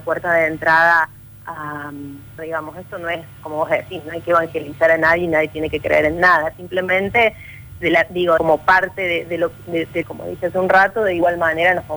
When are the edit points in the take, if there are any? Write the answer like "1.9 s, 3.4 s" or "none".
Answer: 2.4 s, 8.4 s, 10.0 s